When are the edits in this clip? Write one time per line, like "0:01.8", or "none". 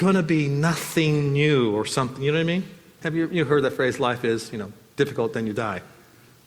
0:03.0